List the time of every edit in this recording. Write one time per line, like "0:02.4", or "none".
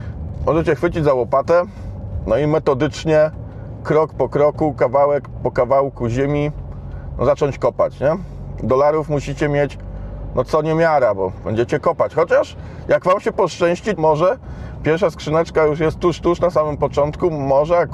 0:14.0